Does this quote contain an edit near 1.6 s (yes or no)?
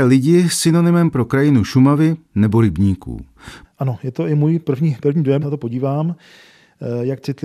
no